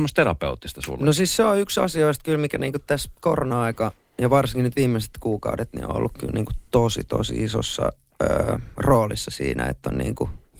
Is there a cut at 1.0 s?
no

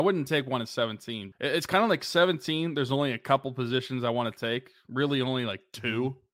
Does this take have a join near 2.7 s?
no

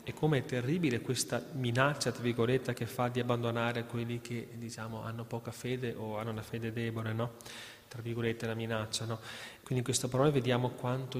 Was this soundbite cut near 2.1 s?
no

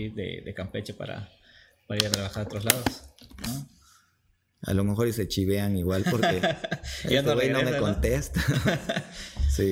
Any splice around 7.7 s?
no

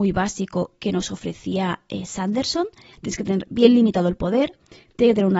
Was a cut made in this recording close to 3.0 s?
yes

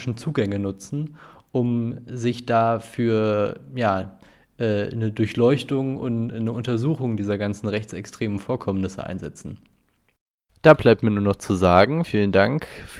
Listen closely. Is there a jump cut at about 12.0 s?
yes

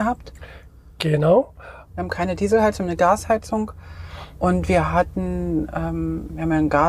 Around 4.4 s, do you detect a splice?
no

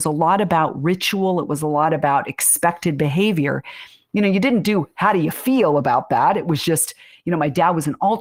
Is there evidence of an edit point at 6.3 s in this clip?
no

